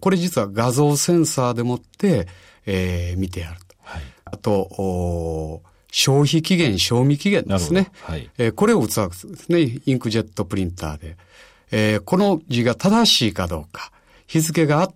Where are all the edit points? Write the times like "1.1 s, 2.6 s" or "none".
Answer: 4.3 s